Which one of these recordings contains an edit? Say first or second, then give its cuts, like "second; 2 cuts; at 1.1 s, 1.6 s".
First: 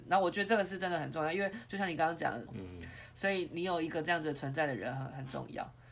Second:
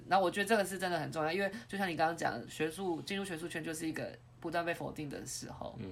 first; 2 cuts; at 2.5 s, 3.5 s